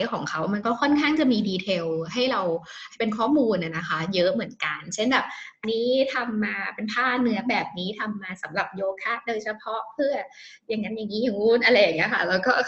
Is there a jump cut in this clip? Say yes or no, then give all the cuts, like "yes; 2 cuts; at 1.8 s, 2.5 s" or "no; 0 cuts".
yes; 1 cut; at 5.6 s